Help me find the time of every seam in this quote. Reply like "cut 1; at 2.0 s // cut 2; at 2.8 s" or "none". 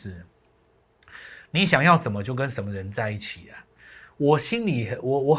none